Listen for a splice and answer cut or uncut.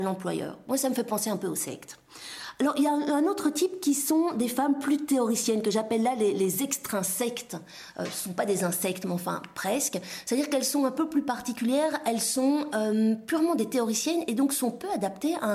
uncut